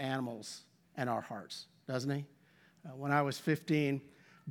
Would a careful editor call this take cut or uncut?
uncut